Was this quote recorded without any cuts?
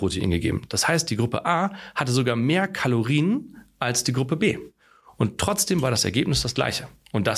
yes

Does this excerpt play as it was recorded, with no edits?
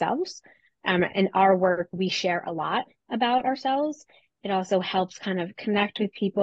yes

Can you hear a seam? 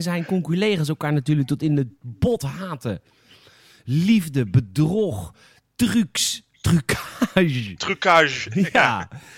no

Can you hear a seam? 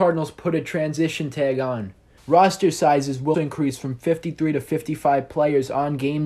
yes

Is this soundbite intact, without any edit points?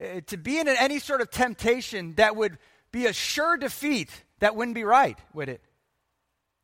yes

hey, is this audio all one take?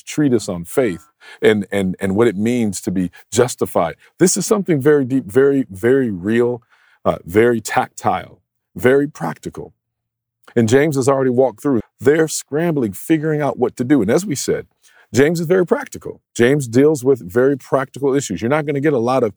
no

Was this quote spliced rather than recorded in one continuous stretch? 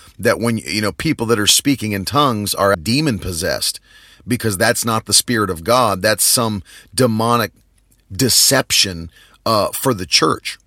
yes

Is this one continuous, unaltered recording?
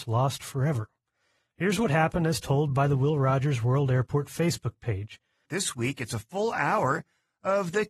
no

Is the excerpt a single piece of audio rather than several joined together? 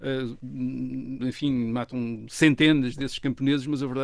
no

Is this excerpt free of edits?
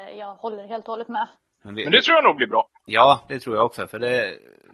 no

